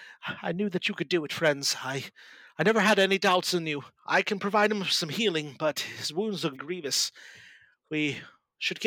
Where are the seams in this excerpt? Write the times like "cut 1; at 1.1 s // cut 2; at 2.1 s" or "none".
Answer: cut 1; at 4.0 s // cut 2; at 6.5 s